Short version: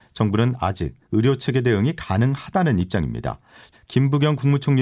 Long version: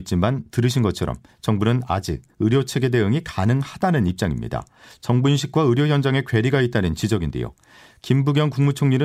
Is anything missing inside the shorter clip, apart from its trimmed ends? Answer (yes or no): yes